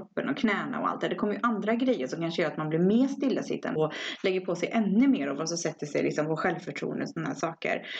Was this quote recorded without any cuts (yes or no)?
no